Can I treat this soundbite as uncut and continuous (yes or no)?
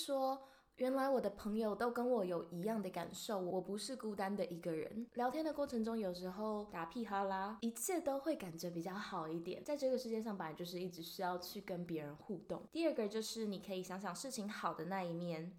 yes